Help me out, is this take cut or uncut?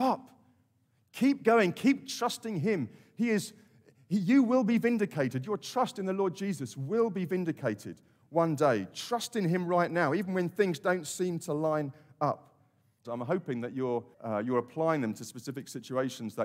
cut